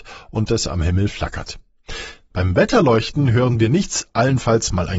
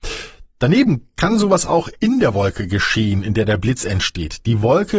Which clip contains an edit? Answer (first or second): first